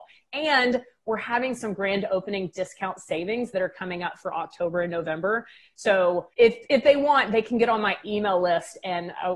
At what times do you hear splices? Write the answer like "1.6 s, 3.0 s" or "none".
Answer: 6.3 s